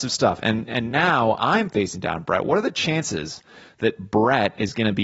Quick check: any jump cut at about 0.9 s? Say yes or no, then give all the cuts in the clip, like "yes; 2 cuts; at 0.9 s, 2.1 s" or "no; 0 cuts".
no; 0 cuts